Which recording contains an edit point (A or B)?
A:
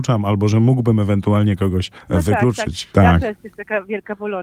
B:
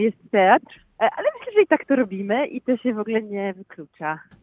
A